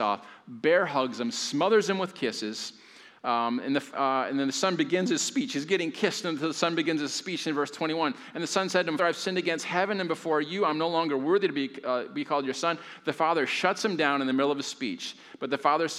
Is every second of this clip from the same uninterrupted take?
no; 1 cut; at 9.0 s

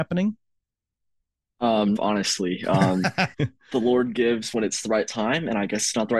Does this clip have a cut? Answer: yes; 2 cuts; at 2.0 s, 3.3 s

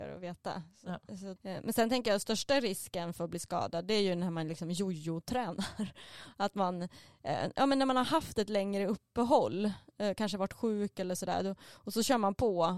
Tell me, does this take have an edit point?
yes; 1 cut; at 1.4 s

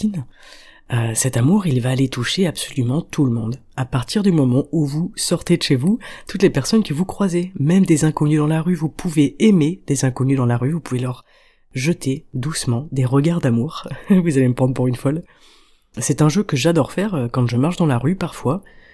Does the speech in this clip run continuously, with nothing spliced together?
yes; 0 cuts

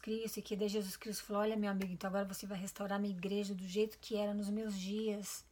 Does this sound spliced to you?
no; 0 cuts

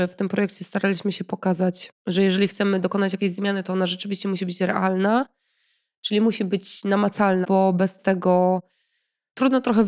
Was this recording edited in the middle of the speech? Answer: yes; 1 cut; at 7.4 s

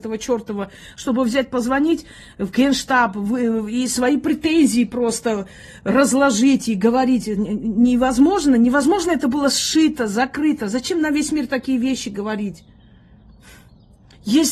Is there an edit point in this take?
no; 0 cuts

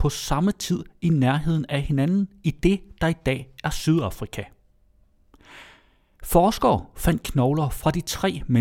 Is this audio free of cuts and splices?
yes; 0 cuts

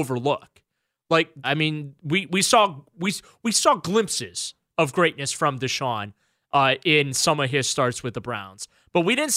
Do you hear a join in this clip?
yes; 1 cut; at 1.4 s

